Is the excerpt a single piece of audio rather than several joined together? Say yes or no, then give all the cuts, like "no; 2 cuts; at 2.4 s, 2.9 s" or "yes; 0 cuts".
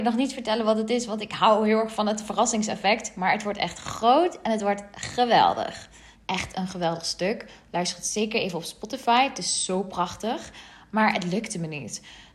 no; 1 cut; at 6.1 s